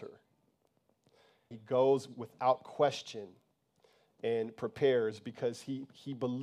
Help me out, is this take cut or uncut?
cut